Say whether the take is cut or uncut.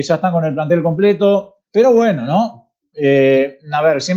cut